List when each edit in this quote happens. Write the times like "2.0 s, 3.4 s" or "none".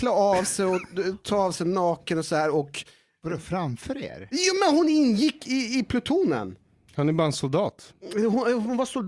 none

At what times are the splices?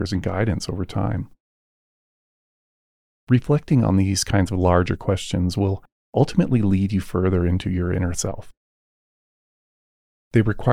none

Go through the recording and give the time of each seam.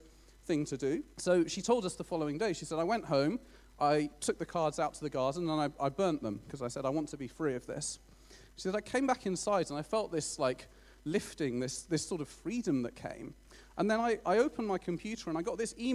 1.1 s

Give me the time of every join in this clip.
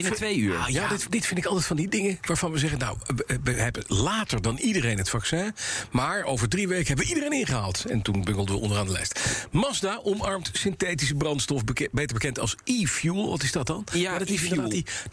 1.1 s

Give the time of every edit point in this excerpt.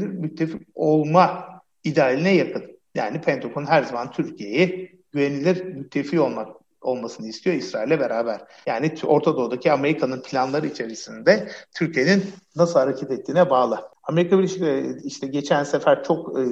8.6 s

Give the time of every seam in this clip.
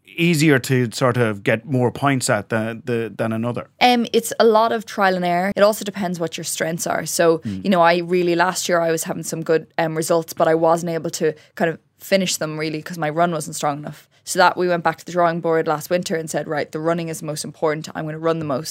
3.7 s, 5.5 s

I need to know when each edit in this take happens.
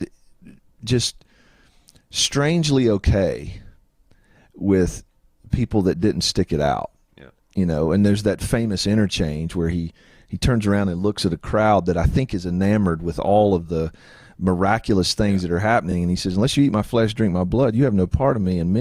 none

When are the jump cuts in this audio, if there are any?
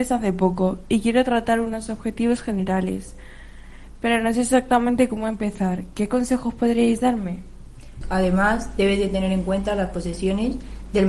8.0 s

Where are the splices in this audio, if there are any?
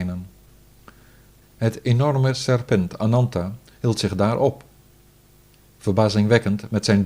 none

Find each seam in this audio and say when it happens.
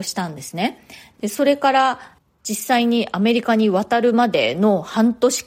1.2 s

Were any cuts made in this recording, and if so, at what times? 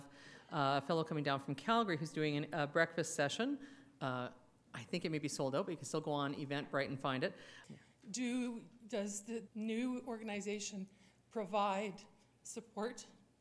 7.6 s, 9.5 s

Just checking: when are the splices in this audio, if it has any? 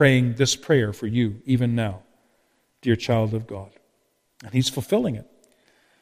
none

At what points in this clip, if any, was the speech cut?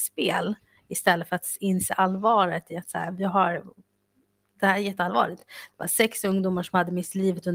none

